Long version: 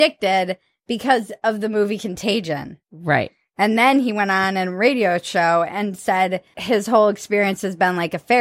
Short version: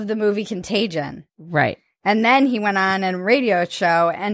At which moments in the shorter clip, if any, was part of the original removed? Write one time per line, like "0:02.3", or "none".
none